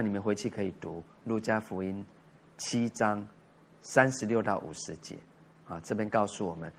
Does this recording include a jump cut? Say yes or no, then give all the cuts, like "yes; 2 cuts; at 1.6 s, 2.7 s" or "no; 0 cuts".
no; 0 cuts